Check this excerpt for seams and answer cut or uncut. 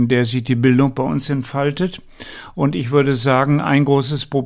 uncut